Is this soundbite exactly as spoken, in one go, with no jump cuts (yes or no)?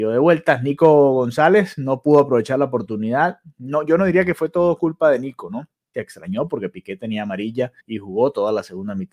no